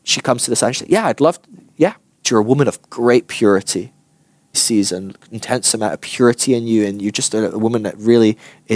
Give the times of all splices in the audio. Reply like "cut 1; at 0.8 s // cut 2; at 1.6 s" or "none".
cut 1; at 2.2 s // cut 2; at 4.5 s